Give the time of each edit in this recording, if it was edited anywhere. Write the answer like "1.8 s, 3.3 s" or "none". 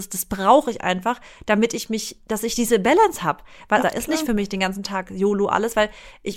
3.8 s